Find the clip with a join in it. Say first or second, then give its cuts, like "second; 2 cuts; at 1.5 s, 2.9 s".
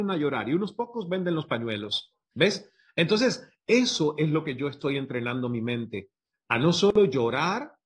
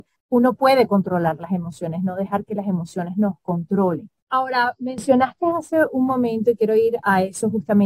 second; 1 cut; at 4.3 s